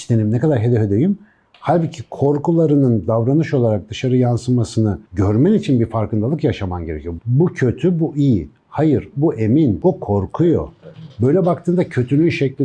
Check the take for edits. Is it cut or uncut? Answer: cut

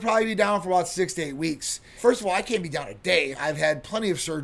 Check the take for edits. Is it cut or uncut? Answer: cut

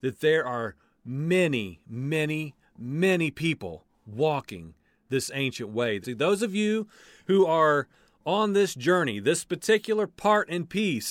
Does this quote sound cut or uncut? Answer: cut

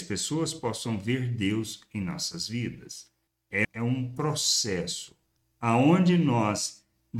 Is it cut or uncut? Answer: cut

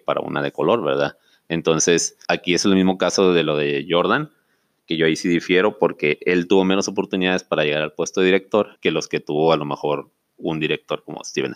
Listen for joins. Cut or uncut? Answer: cut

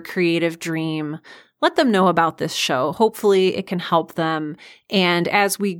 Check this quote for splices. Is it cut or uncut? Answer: uncut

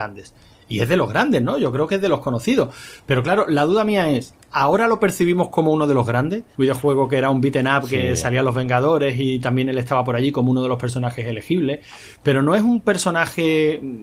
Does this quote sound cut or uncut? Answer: cut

